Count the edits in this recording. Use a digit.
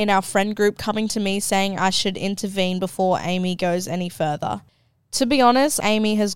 0